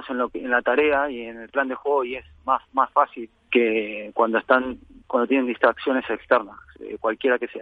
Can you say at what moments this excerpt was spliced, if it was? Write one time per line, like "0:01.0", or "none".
0:03.5